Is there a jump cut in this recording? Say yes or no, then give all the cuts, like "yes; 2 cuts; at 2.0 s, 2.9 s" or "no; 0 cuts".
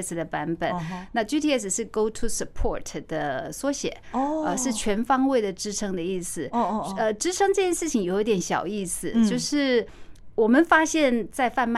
no; 0 cuts